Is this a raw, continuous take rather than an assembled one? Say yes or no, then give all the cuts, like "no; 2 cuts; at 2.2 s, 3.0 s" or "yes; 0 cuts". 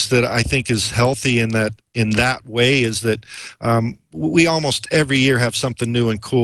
yes; 0 cuts